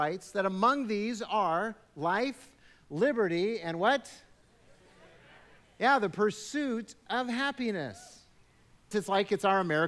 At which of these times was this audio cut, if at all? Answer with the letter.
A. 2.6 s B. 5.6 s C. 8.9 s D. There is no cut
C